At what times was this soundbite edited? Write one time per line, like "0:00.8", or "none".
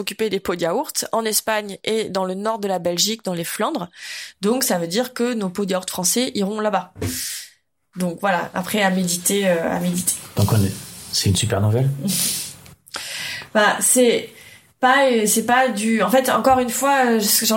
none